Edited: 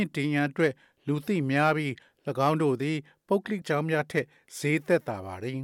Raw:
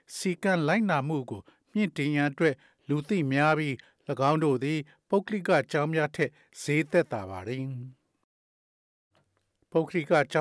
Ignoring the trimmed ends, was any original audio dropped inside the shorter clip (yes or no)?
yes